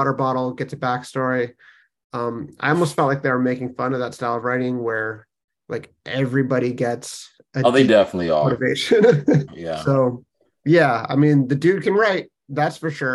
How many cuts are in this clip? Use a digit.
1